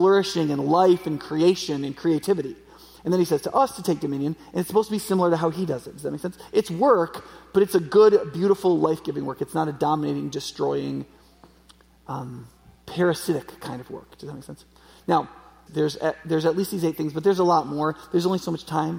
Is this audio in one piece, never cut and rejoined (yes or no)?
no